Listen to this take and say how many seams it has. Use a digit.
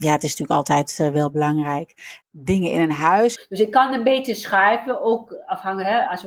2